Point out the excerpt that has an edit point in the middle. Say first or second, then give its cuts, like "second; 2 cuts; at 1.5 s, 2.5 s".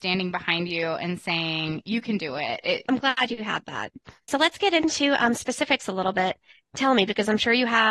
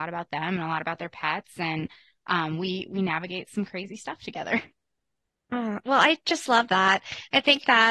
first; 1 cut; at 2.8 s